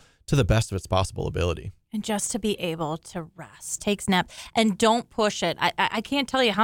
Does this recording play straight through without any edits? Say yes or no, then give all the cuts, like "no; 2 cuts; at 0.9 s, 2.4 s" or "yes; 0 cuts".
no; 1 cut; at 3.8 s